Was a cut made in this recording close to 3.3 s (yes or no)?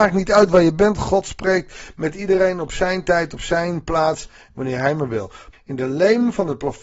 no